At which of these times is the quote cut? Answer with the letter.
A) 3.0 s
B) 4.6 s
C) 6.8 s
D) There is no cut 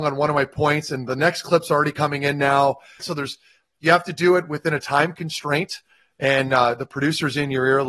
A